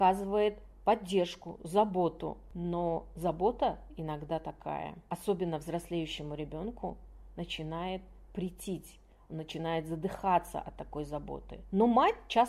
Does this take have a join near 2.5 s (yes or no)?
no